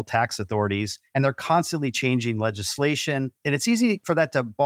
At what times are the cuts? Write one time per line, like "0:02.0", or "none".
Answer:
0:01.1
0:03.4